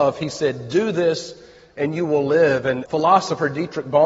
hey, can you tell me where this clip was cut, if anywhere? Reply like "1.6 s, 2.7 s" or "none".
2.9 s